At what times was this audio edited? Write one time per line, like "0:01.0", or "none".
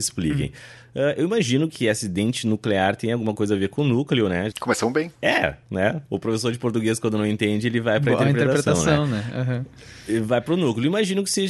0:04.5